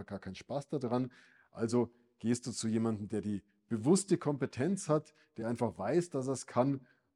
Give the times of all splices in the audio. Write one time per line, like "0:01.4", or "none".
none